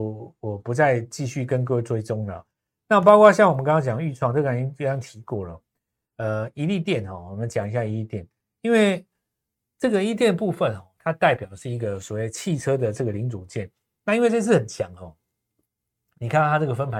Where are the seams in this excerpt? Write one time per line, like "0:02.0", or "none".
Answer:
none